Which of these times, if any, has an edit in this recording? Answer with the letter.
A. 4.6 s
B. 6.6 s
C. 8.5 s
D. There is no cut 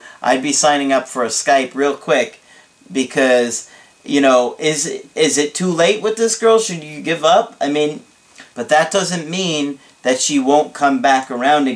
C